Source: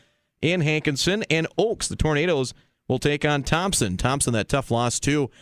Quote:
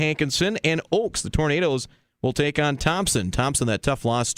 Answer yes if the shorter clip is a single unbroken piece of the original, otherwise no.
yes